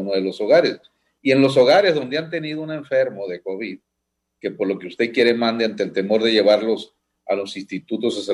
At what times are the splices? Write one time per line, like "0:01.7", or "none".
none